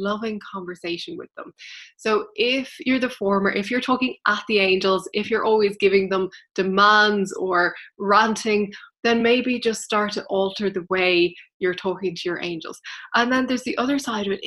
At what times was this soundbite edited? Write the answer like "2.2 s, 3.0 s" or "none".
none